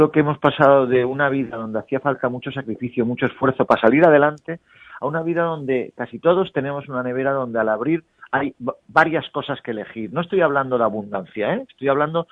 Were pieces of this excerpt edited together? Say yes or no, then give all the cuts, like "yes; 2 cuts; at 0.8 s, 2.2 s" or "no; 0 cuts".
no; 0 cuts